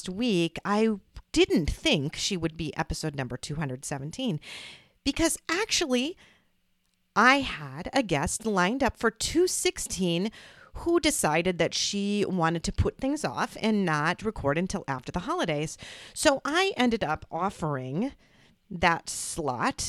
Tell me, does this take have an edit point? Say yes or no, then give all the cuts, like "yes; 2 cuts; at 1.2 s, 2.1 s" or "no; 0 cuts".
no; 0 cuts